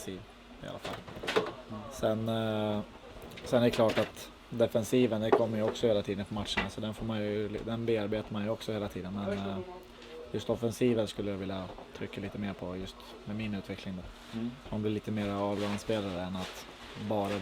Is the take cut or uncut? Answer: uncut